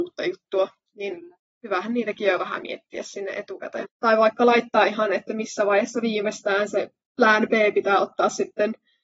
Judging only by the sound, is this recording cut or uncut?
cut